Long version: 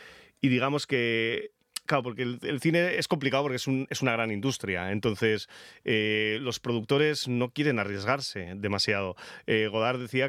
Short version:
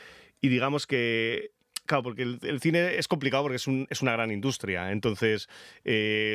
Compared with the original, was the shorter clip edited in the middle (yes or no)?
no